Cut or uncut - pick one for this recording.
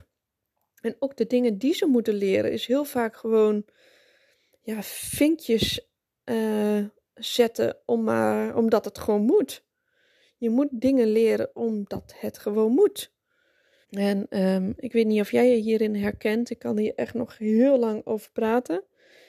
cut